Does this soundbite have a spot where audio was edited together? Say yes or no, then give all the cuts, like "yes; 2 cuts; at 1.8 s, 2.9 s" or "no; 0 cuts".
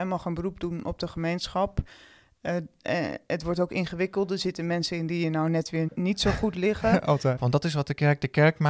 yes; 2 cuts; at 5.9 s, 7.4 s